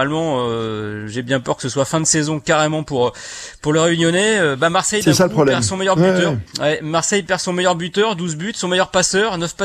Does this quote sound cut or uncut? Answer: uncut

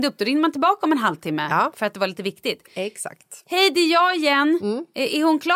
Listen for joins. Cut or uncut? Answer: uncut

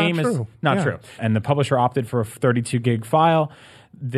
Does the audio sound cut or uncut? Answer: cut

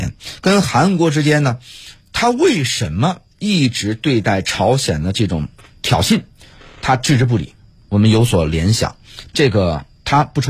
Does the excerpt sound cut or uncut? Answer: cut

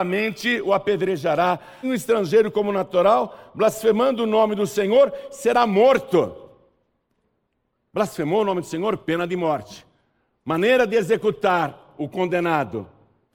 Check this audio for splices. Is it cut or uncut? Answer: cut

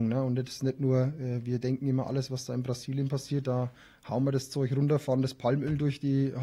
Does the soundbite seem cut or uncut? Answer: uncut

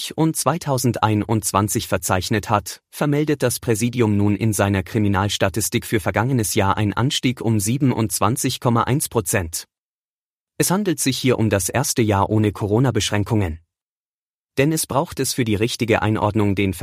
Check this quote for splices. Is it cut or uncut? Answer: cut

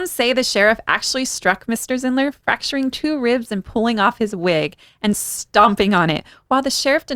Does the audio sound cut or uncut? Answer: uncut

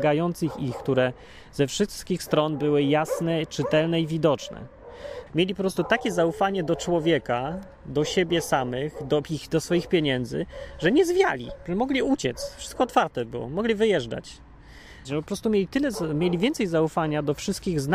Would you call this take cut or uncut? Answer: cut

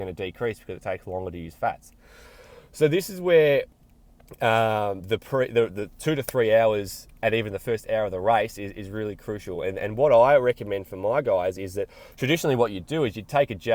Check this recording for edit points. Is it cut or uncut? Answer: uncut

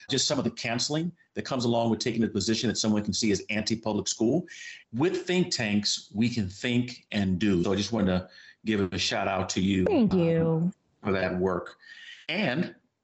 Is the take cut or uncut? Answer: cut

